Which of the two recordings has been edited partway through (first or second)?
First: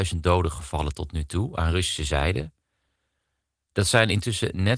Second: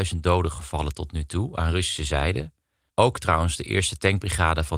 second